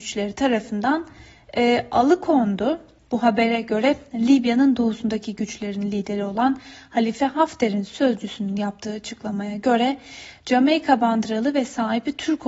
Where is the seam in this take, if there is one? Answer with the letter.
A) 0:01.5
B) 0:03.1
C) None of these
B